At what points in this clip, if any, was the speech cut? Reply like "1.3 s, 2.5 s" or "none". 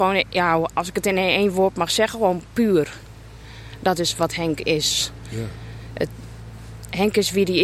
none

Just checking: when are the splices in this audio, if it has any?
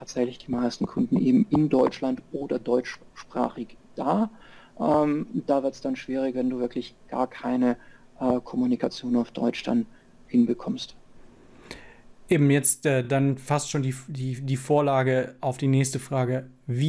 none

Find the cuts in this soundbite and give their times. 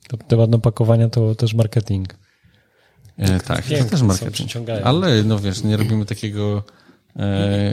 none

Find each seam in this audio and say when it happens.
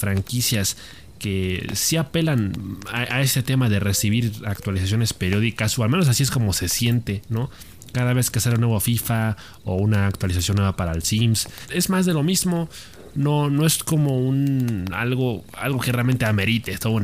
none

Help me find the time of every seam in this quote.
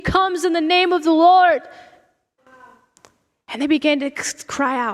2.4 s

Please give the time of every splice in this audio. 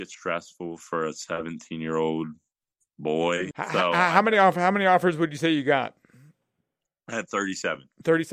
3.5 s

